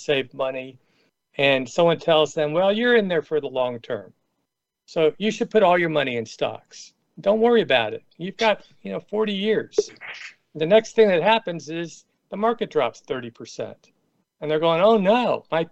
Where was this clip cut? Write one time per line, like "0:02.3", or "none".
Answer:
none